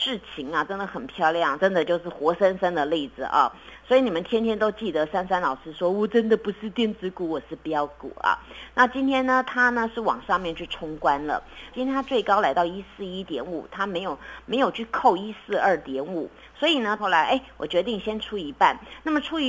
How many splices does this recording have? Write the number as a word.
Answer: three